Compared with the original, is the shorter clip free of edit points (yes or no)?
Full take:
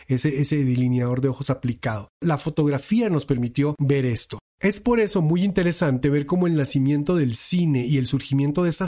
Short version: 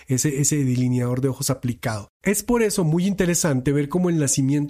no